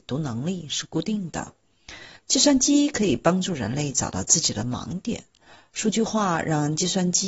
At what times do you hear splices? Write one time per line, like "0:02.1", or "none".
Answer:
none

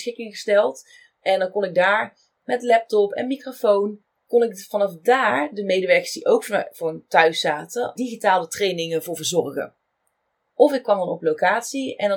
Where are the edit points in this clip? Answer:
0:08.0
0:10.5

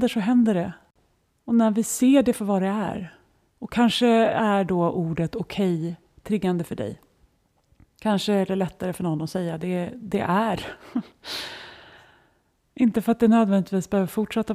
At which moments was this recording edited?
none

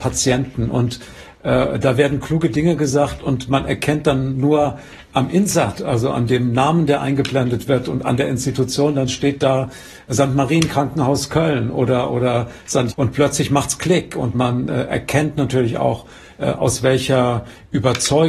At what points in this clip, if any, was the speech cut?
0:12.9
0:14.3

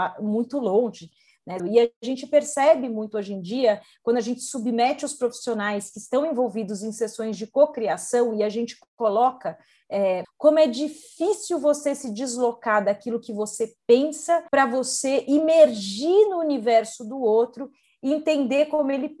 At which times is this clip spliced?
0:01.6
0:10.2
0:14.5

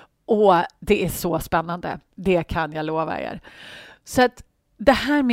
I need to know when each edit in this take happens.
0:02.1

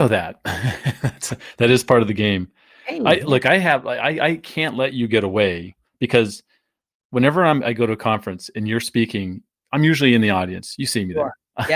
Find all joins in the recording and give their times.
none

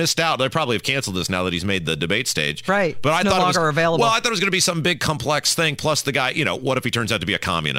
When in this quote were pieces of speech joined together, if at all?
none

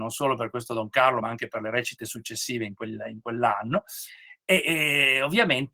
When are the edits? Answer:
none

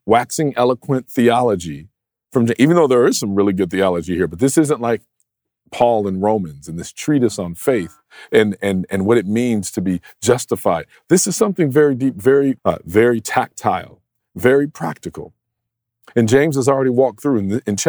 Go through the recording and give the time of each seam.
0:12.6

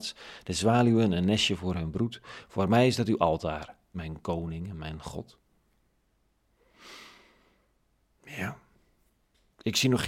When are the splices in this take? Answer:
0:03.9

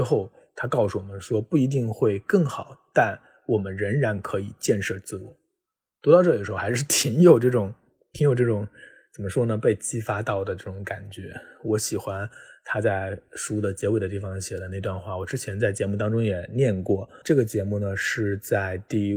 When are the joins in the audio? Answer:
0:17.2

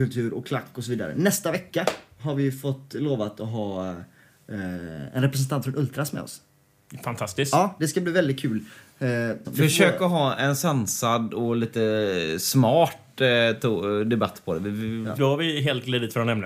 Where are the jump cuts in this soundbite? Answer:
0:09.4
0:15.2

